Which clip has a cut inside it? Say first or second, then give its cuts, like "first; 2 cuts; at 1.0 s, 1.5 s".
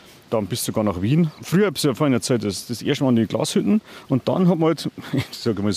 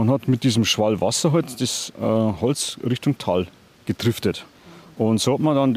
first; 1 cut; at 1.4 s